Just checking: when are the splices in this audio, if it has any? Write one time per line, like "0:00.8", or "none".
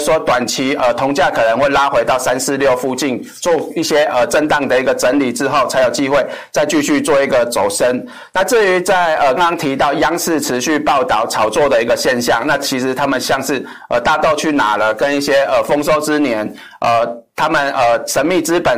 0:09.4

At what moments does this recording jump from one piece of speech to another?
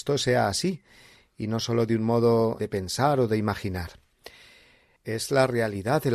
0:02.6

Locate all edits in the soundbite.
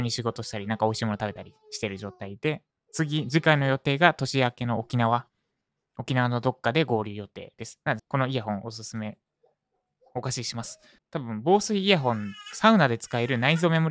0:08.0
0:11.0

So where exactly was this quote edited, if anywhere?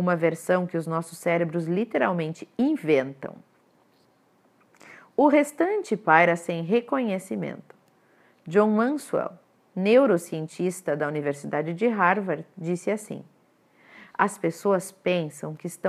none

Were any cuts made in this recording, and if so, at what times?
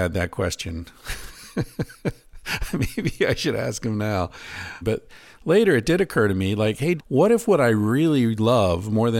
0:04.8
0:07.0

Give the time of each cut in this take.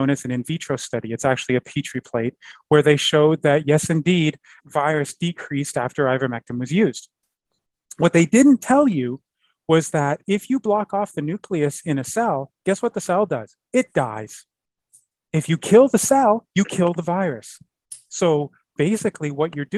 0:04.6

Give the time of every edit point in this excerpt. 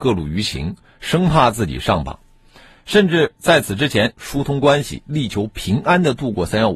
0:04.1

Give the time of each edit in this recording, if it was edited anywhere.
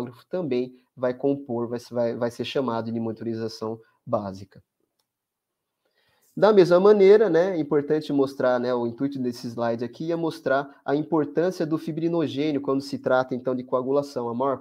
none

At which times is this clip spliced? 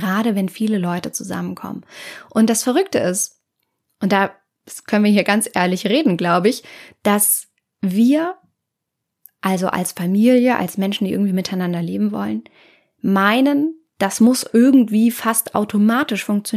none

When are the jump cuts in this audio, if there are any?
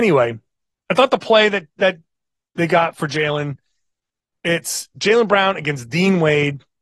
none

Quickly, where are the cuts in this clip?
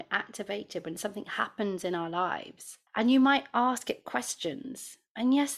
0:02.9

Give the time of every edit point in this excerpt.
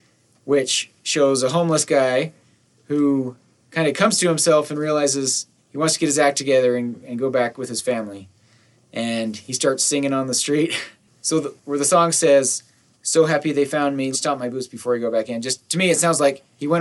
0:12.9
0:14.1

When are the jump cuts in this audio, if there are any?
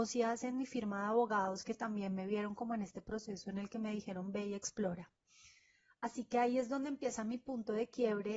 none

